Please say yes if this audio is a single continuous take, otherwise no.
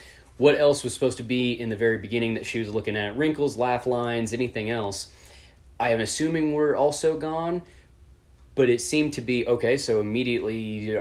yes